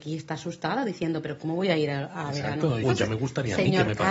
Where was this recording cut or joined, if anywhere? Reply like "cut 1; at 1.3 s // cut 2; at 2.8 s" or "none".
cut 1; at 2.8 s

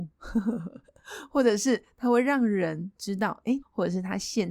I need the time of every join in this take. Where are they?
cut 1; at 3.6 s

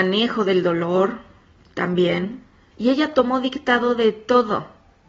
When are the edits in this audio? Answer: cut 1; at 2.7 s

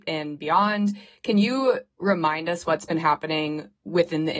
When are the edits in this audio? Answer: none

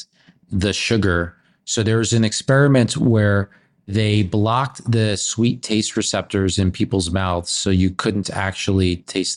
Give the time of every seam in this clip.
none

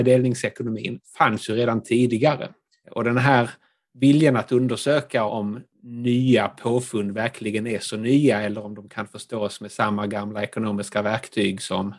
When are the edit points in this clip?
cut 1; at 2.8 s // cut 2; at 5.3 s

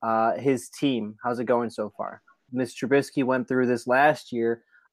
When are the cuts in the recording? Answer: cut 1; at 2.5 s

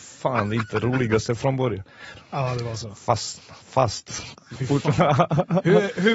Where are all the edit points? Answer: cut 1; at 2.1 s

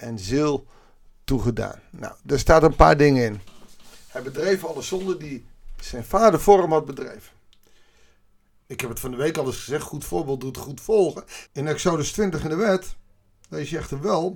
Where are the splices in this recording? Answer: cut 1; at 8.6 s // cut 2; at 11.5 s

